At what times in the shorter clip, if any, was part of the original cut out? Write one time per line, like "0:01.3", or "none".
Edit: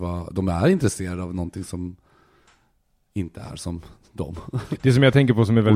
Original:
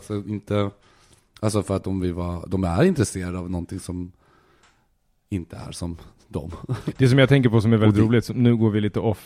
none